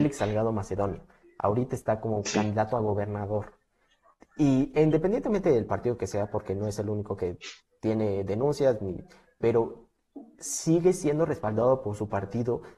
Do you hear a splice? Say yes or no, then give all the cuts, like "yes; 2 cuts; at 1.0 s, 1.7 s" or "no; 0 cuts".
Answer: no; 0 cuts